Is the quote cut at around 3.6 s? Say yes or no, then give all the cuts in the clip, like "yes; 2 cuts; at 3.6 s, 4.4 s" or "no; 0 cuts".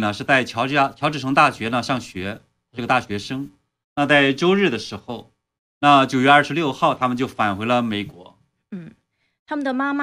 no; 0 cuts